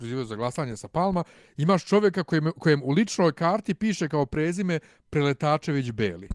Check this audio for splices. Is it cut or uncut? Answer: uncut